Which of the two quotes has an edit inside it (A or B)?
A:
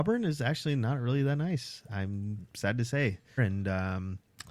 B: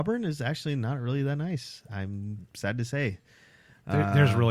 A